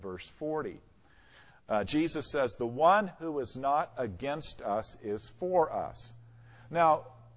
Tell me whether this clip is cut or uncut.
uncut